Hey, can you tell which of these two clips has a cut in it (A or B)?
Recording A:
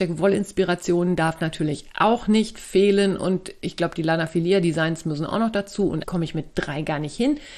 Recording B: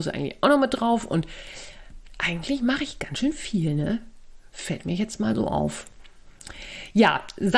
A